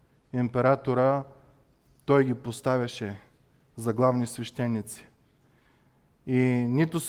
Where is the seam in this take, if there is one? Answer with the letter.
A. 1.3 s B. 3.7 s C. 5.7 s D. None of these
D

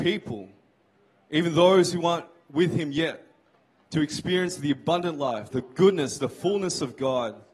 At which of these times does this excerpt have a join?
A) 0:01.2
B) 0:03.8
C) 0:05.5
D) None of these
C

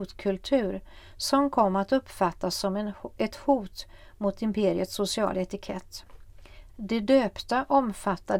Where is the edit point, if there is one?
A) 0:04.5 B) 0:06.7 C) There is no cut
B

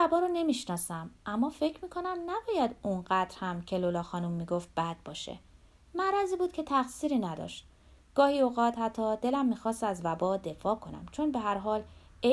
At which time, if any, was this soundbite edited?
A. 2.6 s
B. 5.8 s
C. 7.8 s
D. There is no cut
D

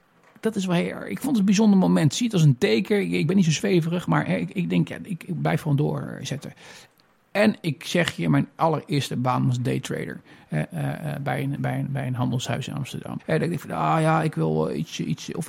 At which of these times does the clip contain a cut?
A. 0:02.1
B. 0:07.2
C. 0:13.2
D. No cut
C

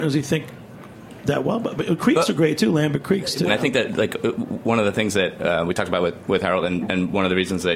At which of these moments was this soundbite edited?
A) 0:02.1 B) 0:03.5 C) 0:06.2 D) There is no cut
B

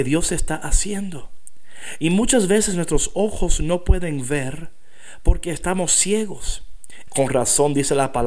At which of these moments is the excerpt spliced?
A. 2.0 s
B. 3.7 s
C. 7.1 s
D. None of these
C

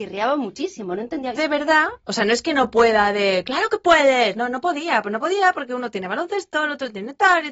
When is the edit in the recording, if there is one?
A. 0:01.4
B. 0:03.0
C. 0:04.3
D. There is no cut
A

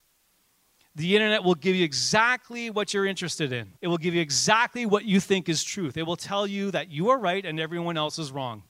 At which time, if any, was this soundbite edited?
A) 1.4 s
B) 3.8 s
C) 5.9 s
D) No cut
B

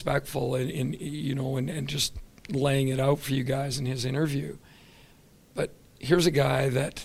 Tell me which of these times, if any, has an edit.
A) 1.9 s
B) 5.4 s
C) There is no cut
C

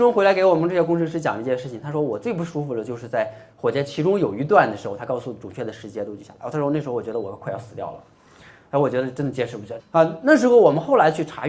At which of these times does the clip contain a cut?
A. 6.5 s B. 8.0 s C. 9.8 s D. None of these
C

